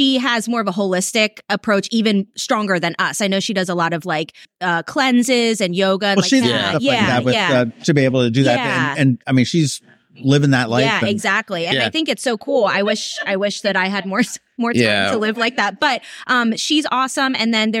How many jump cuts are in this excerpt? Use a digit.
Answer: 1